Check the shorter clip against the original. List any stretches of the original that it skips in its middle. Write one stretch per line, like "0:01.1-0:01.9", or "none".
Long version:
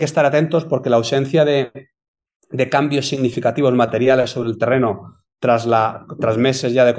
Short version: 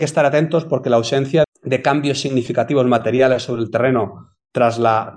0:01.4-0:02.3